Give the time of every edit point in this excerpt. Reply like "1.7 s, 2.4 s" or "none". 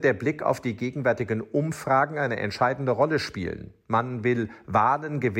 none